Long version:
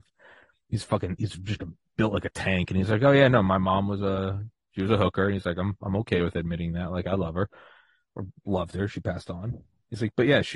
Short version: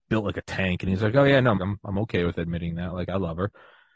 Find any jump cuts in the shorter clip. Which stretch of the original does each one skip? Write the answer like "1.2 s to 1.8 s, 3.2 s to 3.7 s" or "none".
3.5 s to 5.6 s